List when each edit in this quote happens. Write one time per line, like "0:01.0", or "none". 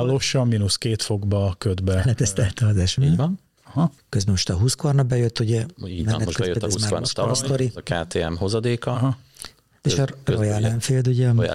0:03.0